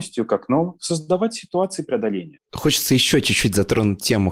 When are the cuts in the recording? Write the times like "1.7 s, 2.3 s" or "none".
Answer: 2.4 s